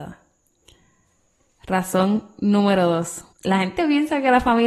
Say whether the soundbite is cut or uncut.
cut